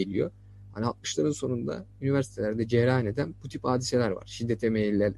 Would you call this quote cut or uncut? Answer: uncut